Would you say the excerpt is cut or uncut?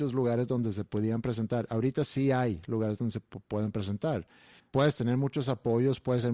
cut